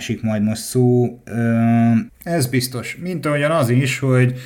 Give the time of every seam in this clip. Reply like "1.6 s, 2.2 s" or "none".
2.1 s